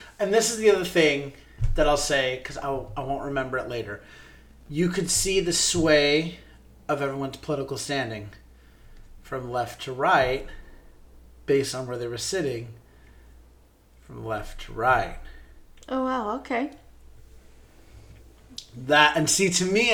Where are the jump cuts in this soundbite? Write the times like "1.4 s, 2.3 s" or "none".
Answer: none